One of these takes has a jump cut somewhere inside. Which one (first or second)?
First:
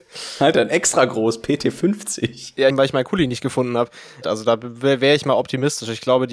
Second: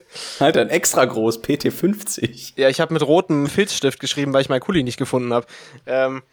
first